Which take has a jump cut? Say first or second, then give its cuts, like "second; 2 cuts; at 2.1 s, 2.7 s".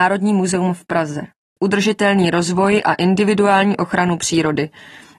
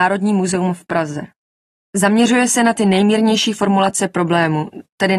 first; 1 cut; at 1.6 s